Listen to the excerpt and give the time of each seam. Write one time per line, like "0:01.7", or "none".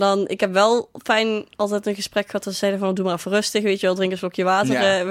none